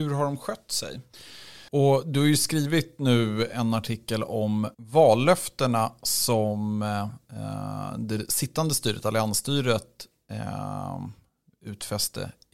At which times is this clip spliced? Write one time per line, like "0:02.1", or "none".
0:01.7
0:04.7